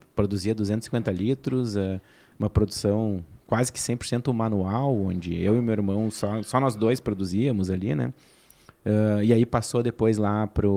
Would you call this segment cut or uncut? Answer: uncut